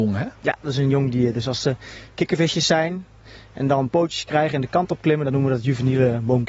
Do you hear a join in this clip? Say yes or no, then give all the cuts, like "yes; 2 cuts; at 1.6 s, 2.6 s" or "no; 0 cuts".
no; 0 cuts